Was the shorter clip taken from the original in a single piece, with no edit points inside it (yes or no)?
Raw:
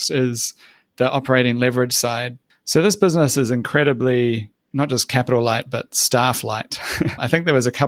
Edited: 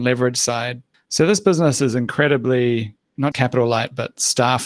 no